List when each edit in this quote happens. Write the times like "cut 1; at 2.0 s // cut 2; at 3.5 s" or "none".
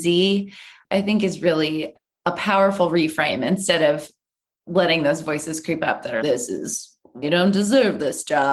cut 1; at 6.2 s // cut 2; at 7.2 s